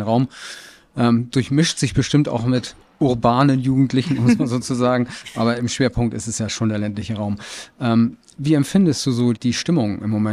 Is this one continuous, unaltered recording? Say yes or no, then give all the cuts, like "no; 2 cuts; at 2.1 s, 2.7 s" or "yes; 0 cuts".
no; 1 cut; at 9.3 s